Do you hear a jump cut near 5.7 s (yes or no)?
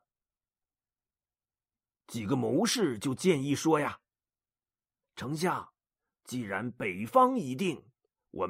no